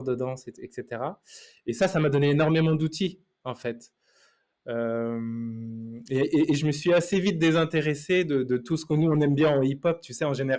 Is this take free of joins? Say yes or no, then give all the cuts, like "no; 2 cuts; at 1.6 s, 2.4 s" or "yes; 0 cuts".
yes; 0 cuts